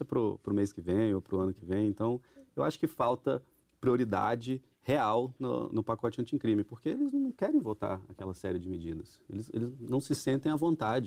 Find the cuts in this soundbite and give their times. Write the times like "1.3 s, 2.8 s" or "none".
5.7 s

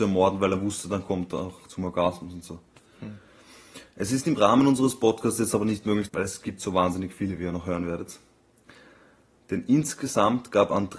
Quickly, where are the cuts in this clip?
6.1 s

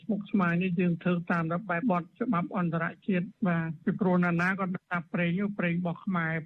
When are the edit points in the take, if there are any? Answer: 1.8 s

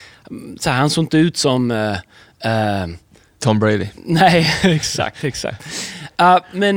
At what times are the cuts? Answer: none

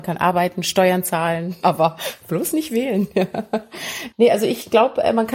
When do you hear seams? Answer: 1.6 s

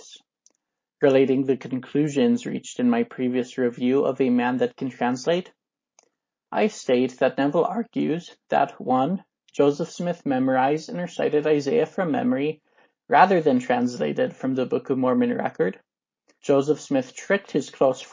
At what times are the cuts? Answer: 16.4 s

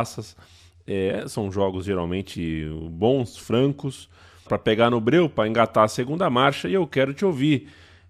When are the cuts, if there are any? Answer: 4.5 s

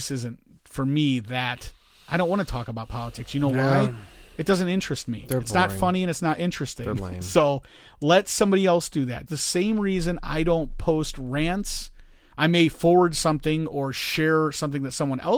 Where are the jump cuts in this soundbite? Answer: 9.3 s

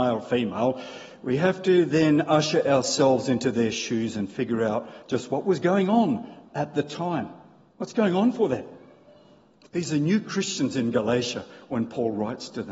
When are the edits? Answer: 9.7 s

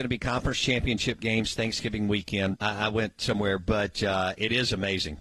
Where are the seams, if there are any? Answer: 2.5 s

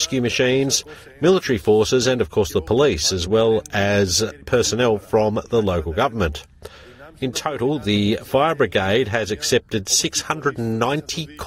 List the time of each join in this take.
none

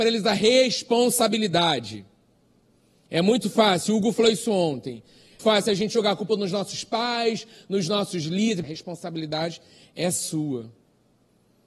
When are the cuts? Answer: 5.4 s, 8.6 s

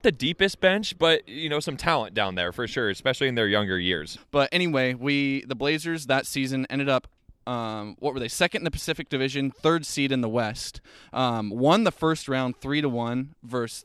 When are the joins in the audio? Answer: 4.2 s

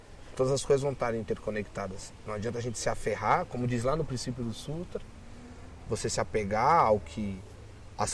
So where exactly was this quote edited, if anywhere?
none

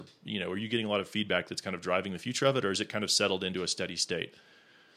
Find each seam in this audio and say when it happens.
none

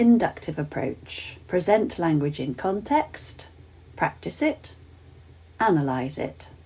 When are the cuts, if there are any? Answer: 1.4 s

